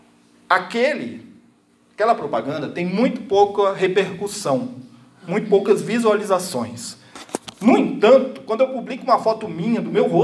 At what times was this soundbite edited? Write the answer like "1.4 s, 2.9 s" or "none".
none